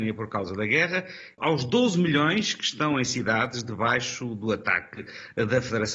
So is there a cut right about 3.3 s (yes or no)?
no